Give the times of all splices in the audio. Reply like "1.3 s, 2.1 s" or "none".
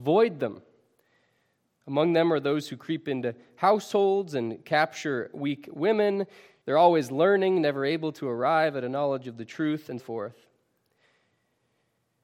6.6 s, 10.0 s